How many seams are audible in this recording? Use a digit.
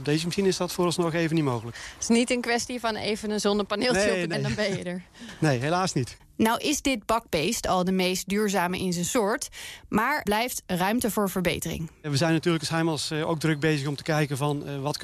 3